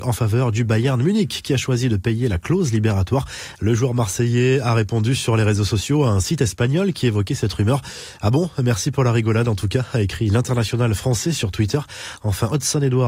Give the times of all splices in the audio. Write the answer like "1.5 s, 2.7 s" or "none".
3.6 s